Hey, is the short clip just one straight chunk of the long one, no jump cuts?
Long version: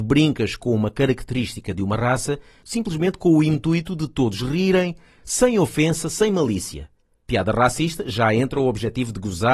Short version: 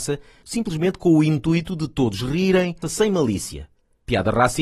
no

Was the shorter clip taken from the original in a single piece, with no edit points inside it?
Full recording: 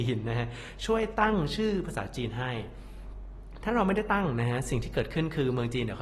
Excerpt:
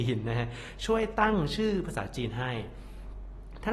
yes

